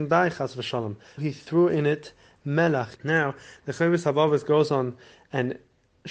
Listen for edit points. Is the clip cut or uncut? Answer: cut